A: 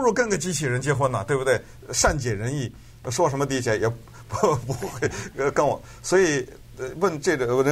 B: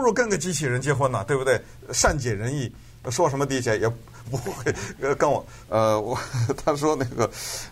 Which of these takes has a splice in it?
B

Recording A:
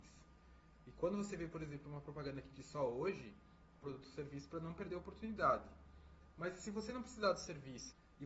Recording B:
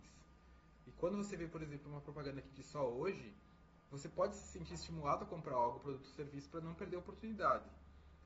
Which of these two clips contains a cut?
A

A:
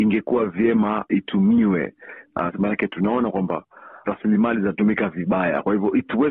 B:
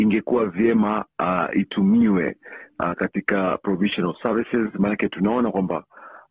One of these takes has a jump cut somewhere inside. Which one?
A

